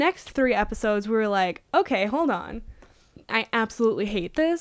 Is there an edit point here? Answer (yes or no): yes